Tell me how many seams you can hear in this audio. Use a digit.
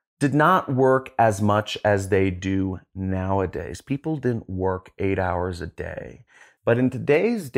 1